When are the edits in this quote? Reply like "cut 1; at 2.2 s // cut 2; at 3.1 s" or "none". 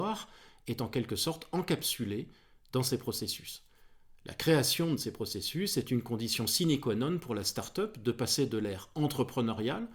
none